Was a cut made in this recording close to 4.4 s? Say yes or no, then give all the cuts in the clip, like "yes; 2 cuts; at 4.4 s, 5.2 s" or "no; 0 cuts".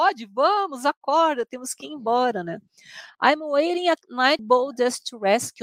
yes; 2 cuts; at 3.1 s, 4.4 s